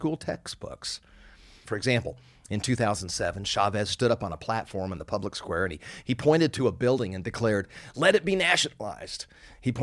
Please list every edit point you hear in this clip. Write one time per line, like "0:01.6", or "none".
0:01.6